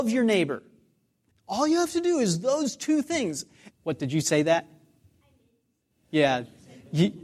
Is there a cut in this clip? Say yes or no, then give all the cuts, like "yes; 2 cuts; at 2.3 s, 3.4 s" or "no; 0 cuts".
yes; 2 cuts; at 1.3 s, 3.7 s